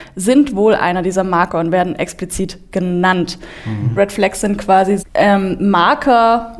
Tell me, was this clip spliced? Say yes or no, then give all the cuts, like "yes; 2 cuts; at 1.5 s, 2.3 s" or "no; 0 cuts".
yes; 2 cuts; at 4.0 s, 5.0 s